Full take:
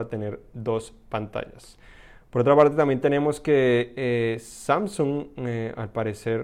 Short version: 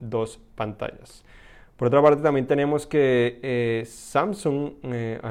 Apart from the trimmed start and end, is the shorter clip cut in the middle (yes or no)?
no